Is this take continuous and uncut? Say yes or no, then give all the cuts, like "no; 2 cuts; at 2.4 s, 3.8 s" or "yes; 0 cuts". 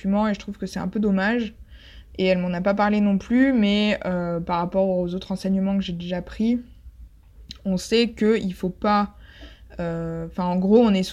yes; 0 cuts